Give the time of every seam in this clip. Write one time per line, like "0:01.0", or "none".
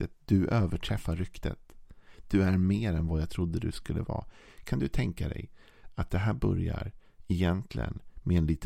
none